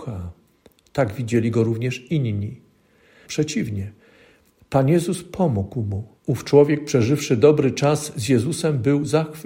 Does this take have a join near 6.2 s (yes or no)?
yes